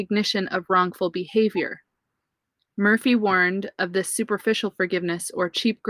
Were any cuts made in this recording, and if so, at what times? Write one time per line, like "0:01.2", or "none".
none